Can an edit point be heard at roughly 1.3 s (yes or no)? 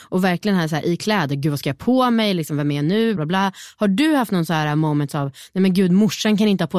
no